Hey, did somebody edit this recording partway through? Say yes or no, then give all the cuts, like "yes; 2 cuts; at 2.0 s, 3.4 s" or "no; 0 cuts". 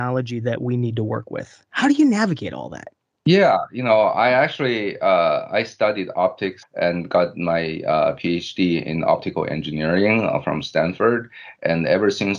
yes; 1 cut; at 6.6 s